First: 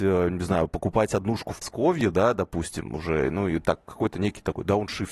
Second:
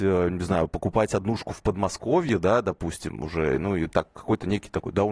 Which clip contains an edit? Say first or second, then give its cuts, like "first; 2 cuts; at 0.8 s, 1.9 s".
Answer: first; 1 cut; at 1.6 s